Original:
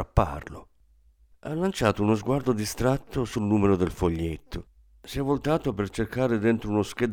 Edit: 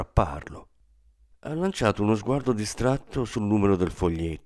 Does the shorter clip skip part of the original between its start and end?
no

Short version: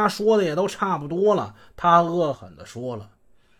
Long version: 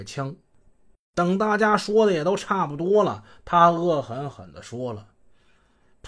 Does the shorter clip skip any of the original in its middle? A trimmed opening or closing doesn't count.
yes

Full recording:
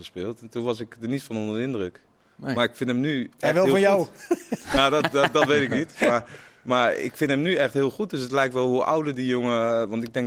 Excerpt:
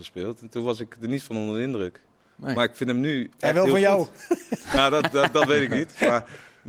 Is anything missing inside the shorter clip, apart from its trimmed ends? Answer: no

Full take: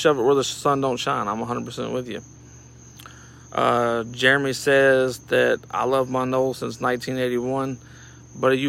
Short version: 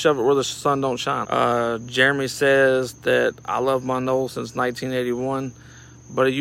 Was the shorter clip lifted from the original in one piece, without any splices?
no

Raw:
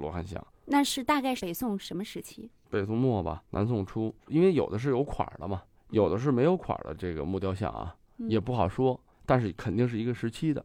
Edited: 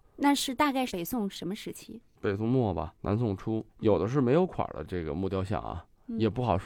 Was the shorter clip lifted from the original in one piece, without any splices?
no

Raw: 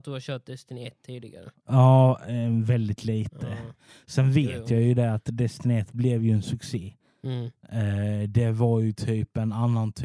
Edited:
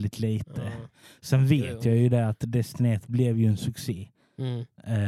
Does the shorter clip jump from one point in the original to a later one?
no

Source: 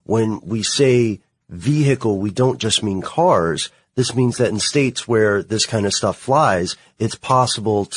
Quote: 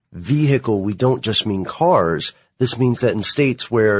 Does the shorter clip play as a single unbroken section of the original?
yes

